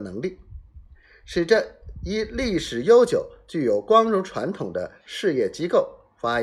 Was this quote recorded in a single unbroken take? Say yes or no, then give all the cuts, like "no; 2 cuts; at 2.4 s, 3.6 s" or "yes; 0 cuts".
yes; 0 cuts